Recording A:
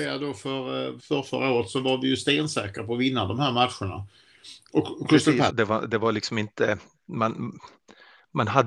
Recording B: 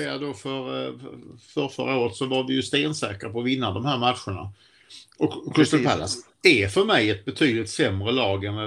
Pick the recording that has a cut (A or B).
A